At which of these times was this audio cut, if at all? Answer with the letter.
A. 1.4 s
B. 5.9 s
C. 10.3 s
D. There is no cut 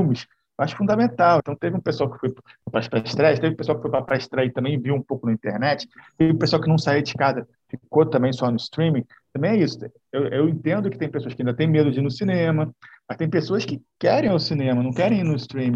A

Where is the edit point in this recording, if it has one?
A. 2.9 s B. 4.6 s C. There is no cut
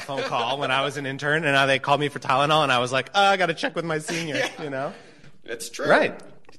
B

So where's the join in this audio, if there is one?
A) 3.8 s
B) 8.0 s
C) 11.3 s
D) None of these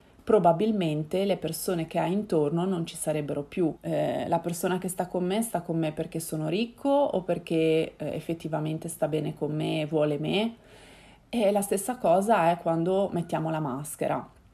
A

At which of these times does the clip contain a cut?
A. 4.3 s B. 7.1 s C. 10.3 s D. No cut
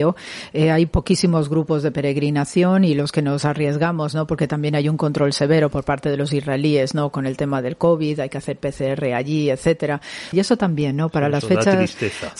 C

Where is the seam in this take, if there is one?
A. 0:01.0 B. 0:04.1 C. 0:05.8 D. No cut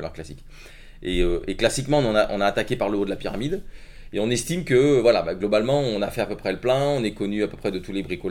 D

